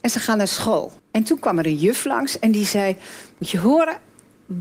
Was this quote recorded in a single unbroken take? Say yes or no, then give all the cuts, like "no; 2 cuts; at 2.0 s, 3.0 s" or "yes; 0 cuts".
no; 1 cut; at 1.0 s